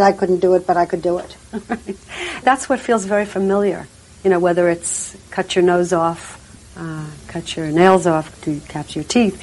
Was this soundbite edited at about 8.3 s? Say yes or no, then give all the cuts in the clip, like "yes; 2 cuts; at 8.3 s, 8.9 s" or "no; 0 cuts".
yes; 2 cuts; at 6.6 s, 8.3 s